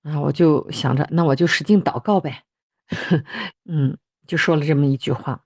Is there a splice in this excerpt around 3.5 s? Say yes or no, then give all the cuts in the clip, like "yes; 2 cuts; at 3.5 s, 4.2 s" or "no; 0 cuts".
yes; 1 cut; at 3.5 s